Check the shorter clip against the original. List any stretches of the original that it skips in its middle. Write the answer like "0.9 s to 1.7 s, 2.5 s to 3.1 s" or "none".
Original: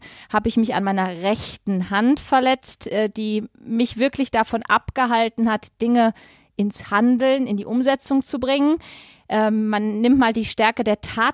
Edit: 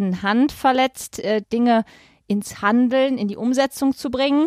3.1 s to 5.7 s